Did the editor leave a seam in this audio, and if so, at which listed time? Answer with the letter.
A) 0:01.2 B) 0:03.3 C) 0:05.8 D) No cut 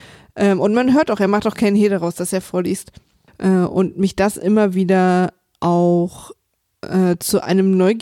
B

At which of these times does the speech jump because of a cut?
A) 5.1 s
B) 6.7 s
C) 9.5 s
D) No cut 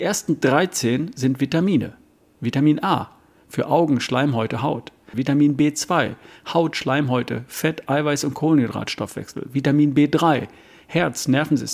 A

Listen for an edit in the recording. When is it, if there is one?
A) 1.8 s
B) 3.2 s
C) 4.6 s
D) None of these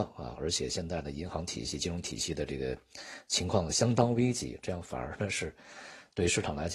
D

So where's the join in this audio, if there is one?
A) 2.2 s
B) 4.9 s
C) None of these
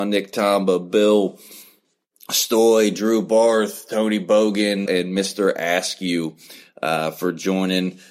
B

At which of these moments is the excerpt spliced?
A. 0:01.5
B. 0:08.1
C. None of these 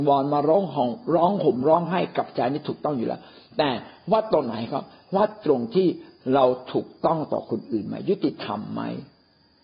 C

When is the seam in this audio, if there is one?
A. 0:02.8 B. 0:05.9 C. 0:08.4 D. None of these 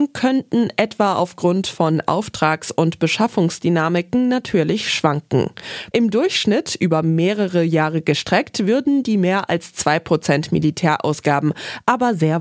B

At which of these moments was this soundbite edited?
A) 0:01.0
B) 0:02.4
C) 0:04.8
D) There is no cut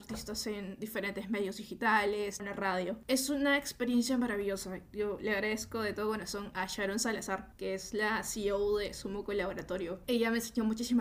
B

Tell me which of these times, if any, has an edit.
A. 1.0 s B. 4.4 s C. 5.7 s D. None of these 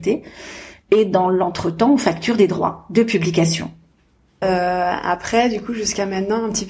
B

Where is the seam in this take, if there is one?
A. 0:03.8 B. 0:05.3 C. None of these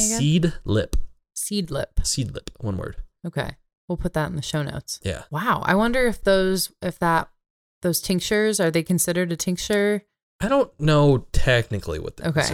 B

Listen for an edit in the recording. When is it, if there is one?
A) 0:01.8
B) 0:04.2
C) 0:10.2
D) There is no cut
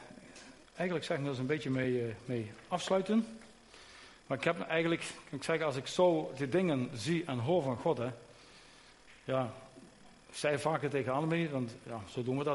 D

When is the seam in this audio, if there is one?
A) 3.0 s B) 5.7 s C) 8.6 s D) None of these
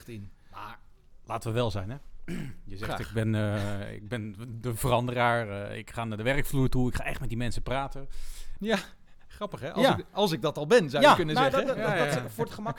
C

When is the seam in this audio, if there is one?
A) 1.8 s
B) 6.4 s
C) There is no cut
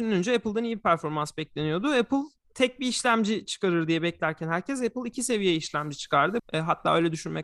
B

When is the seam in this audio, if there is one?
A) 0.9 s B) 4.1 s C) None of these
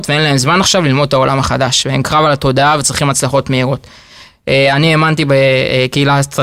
C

